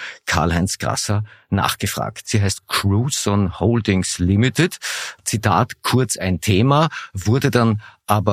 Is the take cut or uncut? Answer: cut